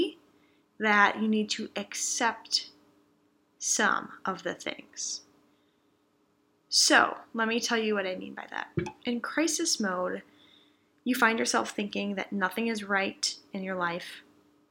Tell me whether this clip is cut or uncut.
uncut